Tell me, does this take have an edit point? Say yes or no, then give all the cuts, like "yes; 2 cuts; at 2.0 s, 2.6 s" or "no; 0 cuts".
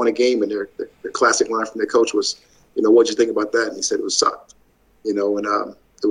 no; 0 cuts